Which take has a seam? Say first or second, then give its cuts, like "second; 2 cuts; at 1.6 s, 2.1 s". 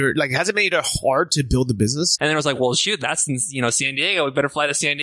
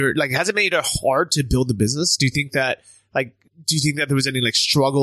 first; 1 cut; at 2.2 s